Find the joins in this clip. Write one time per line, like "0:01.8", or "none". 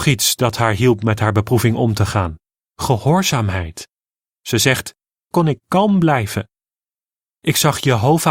0:05.3